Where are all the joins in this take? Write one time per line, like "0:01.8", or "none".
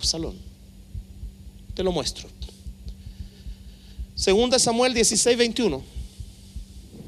none

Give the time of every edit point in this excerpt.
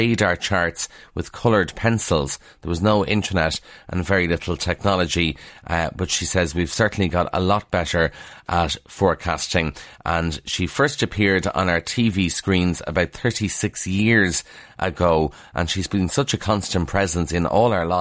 none

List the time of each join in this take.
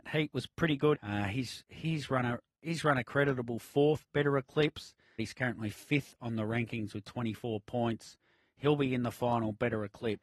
0:00.9
0:05.2

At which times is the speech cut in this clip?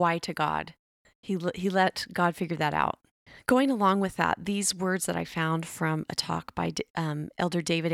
none

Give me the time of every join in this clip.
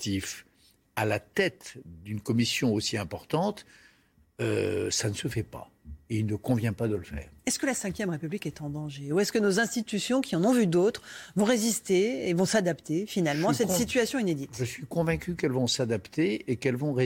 none

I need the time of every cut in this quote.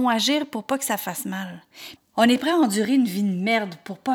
0:02.0

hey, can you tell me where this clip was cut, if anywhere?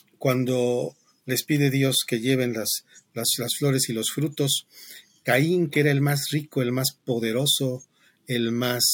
none

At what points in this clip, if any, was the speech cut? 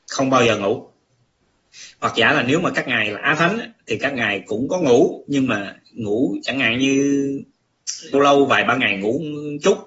0:08.1

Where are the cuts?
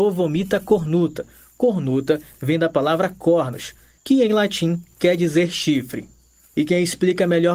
none

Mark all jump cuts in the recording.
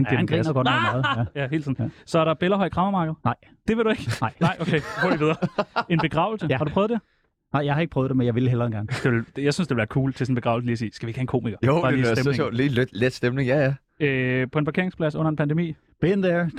none

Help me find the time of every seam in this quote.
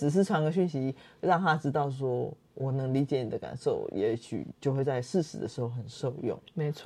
none

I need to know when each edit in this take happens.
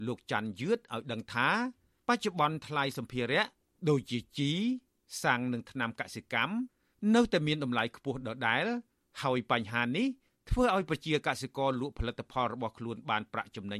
none

